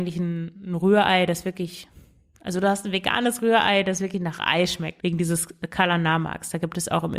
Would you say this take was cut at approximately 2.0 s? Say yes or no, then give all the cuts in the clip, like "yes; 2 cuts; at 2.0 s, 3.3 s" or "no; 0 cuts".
no; 1 cut; at 5.0 s